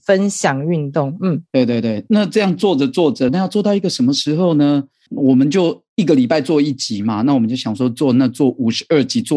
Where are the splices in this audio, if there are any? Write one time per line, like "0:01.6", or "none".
0:03.3